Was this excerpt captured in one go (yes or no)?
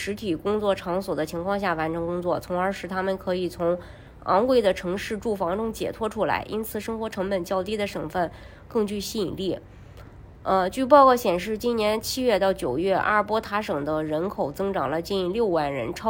yes